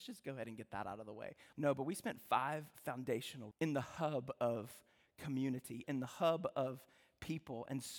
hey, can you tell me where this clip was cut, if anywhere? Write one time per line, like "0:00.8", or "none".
0:01.5
0:03.5
0:05.8